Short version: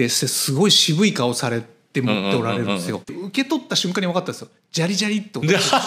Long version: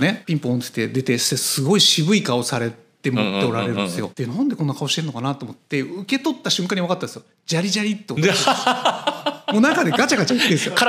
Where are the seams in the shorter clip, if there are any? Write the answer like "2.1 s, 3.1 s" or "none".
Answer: 3.1 s